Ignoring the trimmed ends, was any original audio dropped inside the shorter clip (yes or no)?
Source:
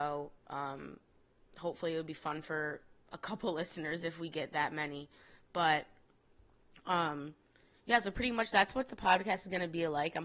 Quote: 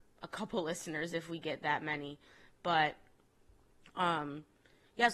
no